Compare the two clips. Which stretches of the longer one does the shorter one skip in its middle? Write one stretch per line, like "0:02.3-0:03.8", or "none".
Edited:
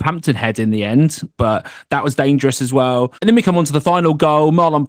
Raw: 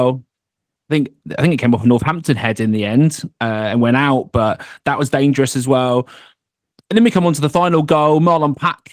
0:03.4-0:04.3
0:06.1-0:06.9